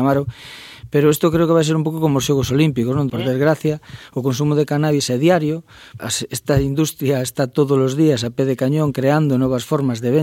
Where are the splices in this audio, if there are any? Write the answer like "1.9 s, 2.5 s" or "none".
3.1 s, 6.0 s